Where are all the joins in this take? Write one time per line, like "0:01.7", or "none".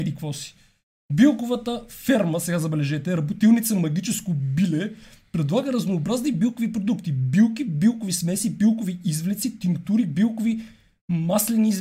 none

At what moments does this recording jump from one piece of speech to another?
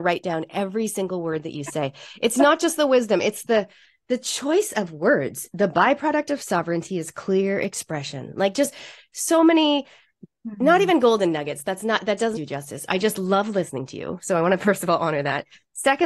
0:12.3

